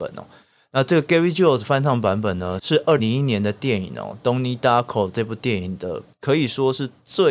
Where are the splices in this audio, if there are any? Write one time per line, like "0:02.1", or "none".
0:03.0